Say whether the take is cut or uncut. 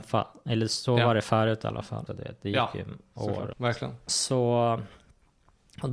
cut